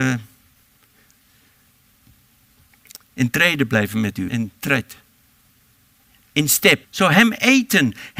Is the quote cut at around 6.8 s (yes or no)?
yes